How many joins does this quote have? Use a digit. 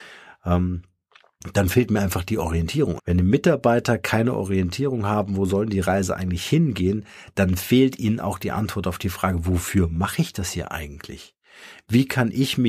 1